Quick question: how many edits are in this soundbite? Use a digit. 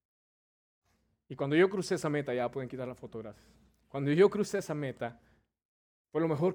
0